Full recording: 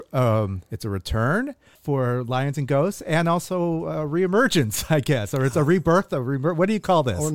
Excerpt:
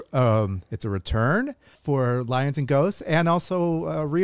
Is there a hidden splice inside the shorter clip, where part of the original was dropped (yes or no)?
no